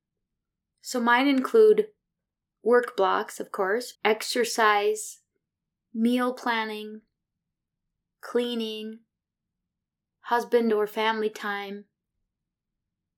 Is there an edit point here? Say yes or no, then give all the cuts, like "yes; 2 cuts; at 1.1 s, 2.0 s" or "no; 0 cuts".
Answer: yes; 1 cut; at 3.9 s